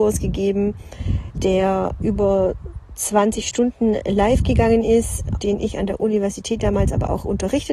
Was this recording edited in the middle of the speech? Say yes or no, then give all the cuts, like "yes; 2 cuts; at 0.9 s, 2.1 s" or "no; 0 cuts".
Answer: yes; 1 cut; at 5.4 s